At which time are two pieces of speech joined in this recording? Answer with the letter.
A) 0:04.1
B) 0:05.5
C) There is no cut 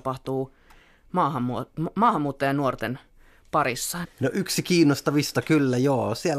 A